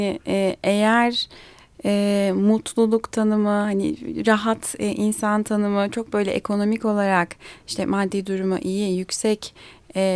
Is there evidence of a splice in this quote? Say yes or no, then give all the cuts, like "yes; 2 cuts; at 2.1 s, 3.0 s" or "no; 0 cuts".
no; 0 cuts